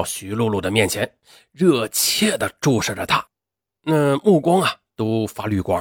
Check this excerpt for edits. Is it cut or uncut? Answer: uncut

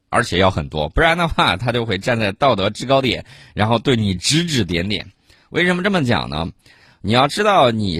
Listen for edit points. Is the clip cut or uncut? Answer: uncut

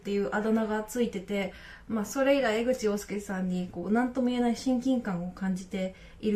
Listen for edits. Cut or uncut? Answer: uncut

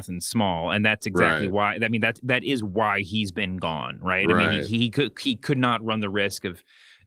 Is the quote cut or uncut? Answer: uncut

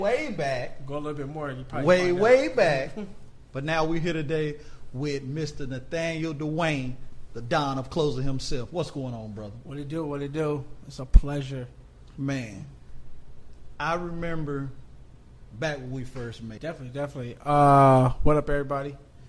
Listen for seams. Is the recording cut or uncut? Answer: cut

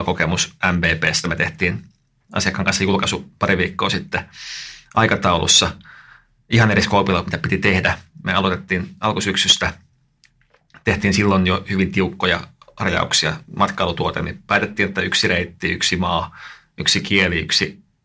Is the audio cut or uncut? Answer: uncut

